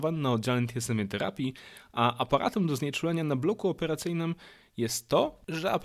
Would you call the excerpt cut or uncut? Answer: uncut